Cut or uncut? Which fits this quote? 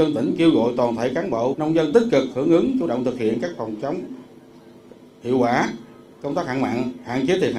cut